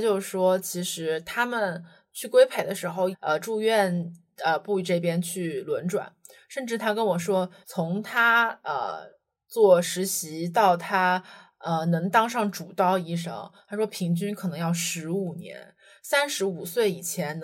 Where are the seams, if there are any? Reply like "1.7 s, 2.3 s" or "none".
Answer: 3.1 s, 7.6 s